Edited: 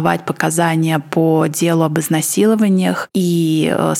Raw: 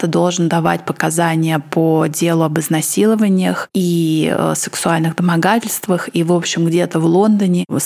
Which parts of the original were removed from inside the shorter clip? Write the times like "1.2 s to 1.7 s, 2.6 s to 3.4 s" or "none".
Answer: none